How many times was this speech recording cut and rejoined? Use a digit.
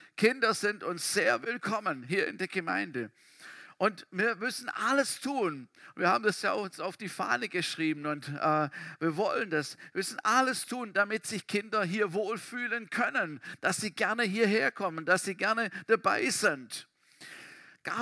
0